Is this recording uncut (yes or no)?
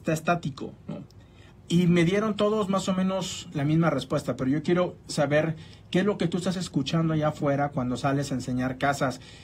no